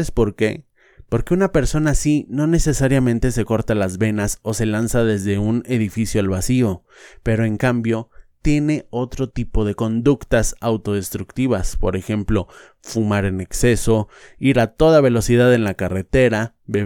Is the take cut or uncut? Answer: uncut